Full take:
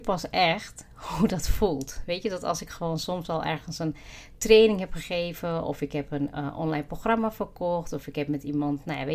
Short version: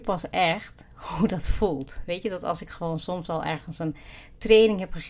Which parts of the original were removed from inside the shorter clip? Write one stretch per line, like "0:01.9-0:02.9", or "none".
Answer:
none